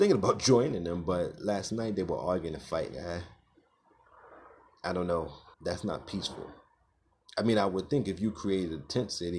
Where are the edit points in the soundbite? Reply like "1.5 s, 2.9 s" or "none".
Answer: 2.9 s, 5.5 s